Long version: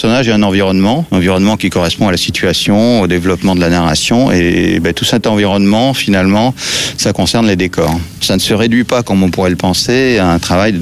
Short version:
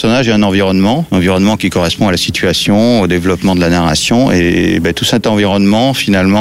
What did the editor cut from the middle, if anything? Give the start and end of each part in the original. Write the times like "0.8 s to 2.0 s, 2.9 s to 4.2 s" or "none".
none